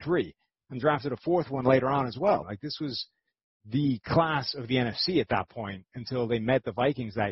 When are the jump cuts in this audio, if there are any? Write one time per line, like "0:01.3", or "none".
0:02.4